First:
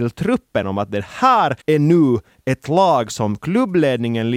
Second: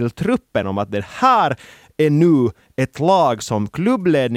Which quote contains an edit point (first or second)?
first